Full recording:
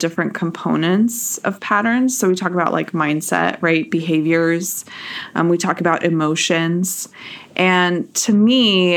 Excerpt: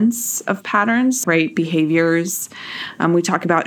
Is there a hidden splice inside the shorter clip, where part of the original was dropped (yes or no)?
yes